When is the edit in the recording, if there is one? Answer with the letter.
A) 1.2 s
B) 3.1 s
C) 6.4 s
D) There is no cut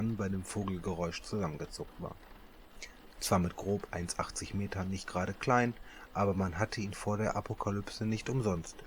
B